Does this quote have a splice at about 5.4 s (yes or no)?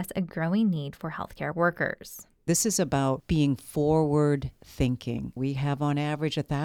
yes